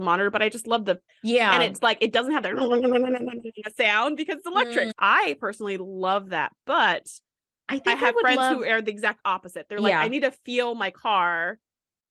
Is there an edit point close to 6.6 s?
no; 2 cuts; at 1.1 s, 4.9 s

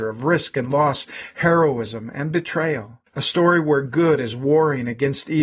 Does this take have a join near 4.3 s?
no; 1 cut; at 3.1 s

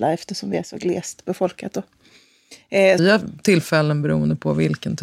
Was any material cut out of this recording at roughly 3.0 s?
yes; 1 cut; at 3.0 s

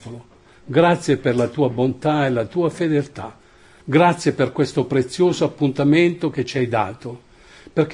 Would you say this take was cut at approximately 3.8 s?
yes; 1 cut; at 3.8 s

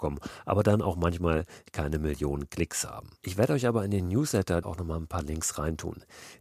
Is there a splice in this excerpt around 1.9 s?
no; 2 cuts; at 3.2 s, 4.6 s

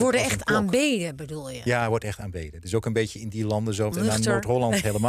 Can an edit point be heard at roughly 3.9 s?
yes; 1 cut; at 3.9 s

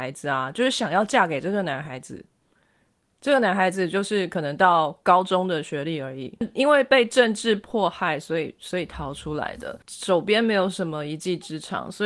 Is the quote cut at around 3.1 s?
no; 0 cuts

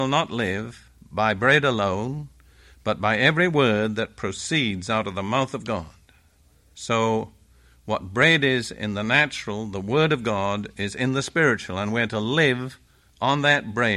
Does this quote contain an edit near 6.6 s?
no; 0 cuts

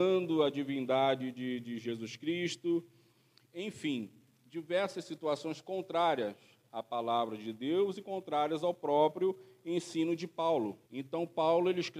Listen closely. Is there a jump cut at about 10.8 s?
yes; 1 cut; at 10.8 s

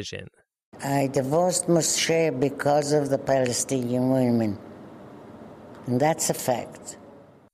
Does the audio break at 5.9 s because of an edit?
no; 0 cuts

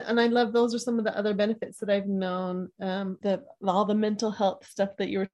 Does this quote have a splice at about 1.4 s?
no; 1 cut; at 3.2 s

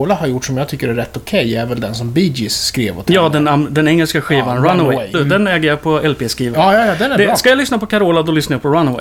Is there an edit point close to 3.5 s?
no; 2 cuts; at 5.1 s, 6.5 s

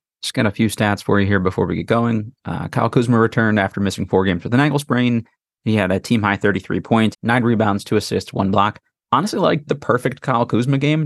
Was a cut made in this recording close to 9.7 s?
yes; 2 cuts; at 7.1 s, 9.7 s

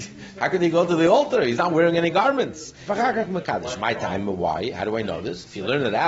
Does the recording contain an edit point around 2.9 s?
yes; 1 cut; at 2.9 s

